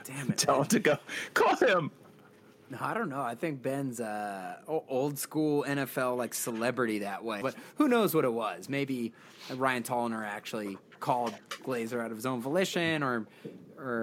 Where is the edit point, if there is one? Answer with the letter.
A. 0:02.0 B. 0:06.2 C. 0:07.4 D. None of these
C